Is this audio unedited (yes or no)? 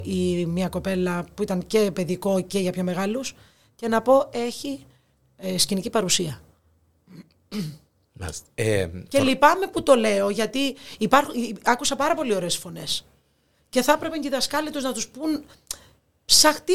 no